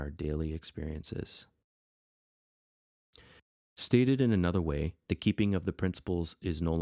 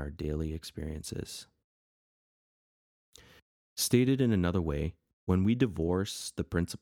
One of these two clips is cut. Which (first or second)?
first